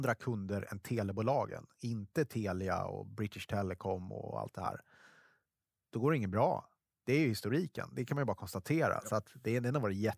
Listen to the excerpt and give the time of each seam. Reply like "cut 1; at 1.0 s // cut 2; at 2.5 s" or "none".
none